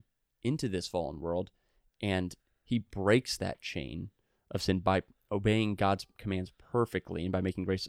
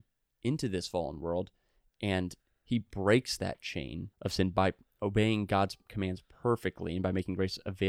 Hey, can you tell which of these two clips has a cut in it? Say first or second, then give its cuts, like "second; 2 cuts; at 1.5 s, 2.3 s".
second; 1 cut; at 4.1 s